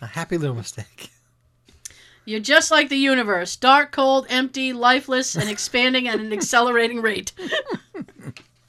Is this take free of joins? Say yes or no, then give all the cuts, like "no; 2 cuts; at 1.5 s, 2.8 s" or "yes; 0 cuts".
yes; 0 cuts